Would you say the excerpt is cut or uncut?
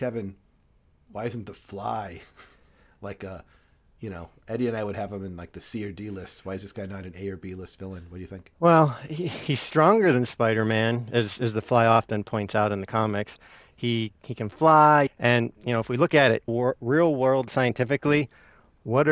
cut